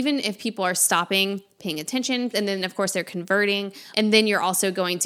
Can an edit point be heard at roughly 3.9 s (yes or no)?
yes